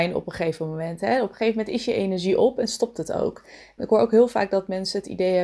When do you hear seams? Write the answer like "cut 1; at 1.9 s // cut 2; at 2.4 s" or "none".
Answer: cut 1; at 3.8 s